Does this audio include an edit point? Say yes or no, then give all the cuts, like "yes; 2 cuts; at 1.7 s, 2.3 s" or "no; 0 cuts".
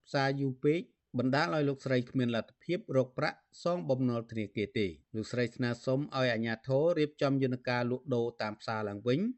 yes; 1 cut; at 5.0 s